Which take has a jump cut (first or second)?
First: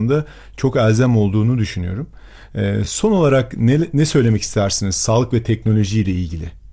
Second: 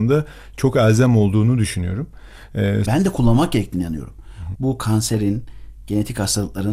second